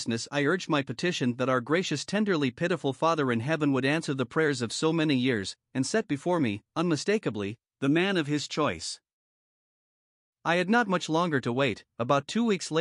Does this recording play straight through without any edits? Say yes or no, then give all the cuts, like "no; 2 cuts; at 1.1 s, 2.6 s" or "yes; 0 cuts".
yes; 0 cuts